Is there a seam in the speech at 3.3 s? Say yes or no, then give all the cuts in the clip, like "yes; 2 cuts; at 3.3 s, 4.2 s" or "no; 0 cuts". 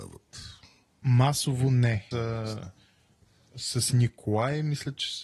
no; 1 cut; at 2.1 s